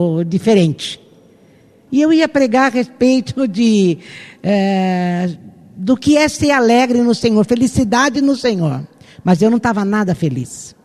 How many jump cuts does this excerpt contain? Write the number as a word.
one